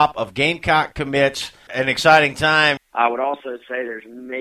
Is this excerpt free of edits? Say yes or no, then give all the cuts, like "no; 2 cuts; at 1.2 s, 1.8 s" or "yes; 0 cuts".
no; 2 cuts; at 1.7 s, 2.8 s